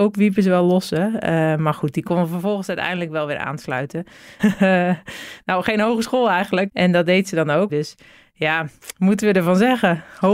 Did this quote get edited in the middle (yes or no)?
yes